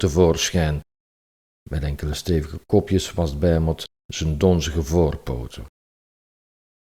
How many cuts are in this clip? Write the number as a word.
zero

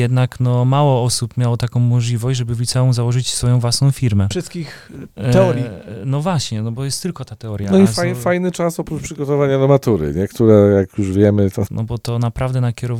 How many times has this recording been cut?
two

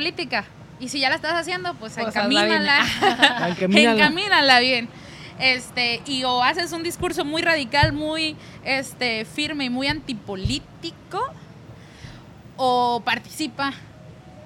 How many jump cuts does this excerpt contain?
zero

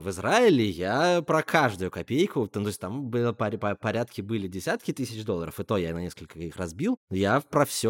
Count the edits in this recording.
zero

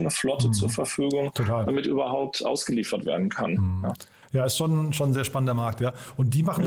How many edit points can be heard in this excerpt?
zero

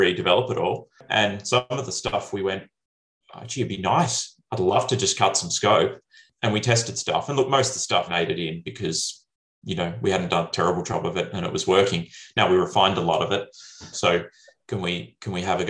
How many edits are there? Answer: three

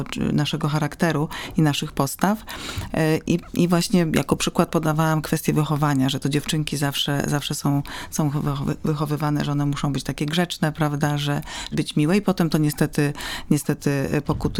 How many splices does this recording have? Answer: one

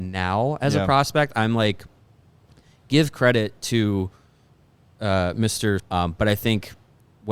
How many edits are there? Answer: one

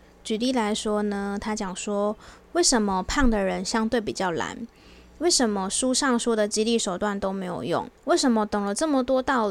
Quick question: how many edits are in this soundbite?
one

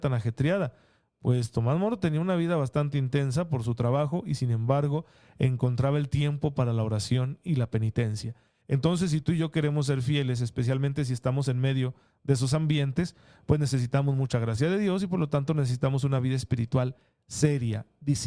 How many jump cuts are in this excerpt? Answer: one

